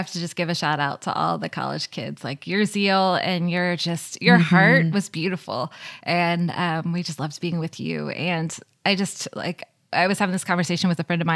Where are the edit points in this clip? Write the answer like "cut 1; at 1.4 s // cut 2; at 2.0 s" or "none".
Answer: none

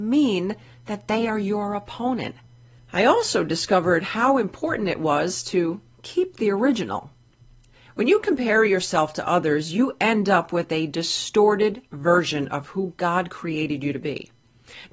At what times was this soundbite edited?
cut 1; at 2.8 s

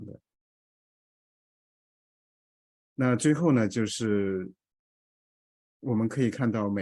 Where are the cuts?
none

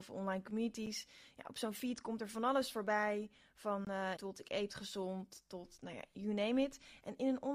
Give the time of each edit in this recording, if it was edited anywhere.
cut 1; at 4.2 s

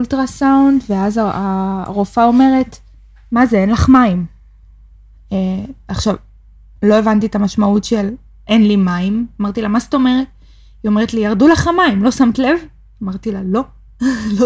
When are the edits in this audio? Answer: none

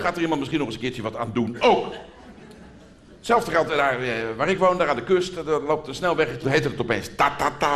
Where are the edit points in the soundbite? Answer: cut 1; at 6.4 s

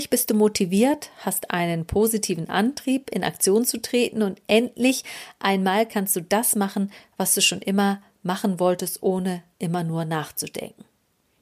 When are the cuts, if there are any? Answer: none

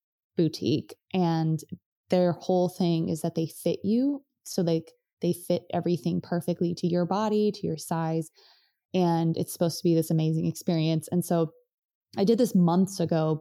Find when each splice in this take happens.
none

